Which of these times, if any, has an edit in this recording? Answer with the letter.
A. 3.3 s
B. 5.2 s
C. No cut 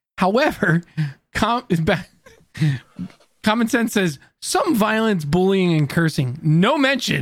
C